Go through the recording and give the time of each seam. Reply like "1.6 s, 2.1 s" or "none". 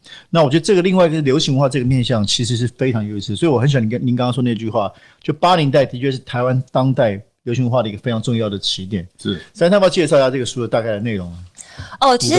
none